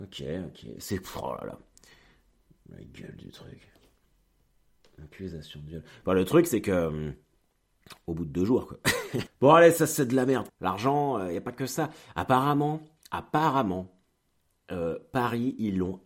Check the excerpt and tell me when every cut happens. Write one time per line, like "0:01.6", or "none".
0:09.3
0:10.5